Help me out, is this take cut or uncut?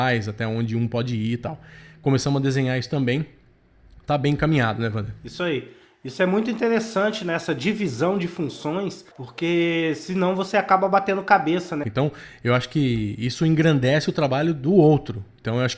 cut